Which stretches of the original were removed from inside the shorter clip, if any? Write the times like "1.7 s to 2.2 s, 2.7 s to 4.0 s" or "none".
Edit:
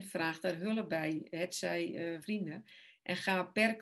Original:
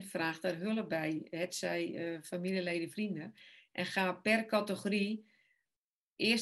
2.2 s to 2.9 s